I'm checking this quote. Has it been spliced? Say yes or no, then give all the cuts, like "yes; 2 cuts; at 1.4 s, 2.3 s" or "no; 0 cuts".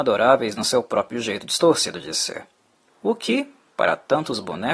yes; 1 cut; at 2.9 s